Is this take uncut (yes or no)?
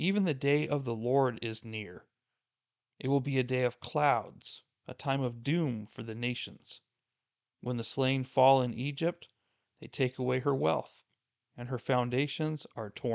no